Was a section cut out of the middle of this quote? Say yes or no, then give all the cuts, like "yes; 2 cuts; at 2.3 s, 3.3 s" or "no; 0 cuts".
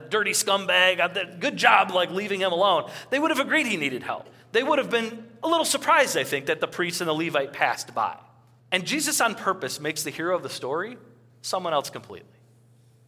yes; 1 cut; at 8.6 s